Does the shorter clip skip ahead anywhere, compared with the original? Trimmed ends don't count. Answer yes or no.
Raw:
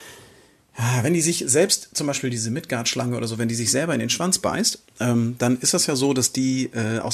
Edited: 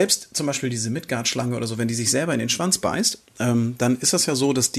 no